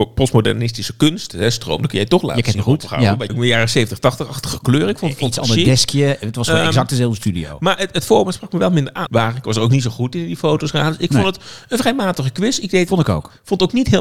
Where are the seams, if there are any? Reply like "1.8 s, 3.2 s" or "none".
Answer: 3.3 s, 9.1 s